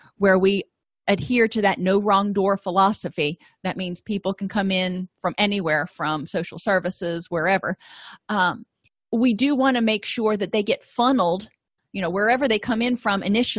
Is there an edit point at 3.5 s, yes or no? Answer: no